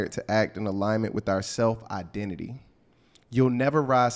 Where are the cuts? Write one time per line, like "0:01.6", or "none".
none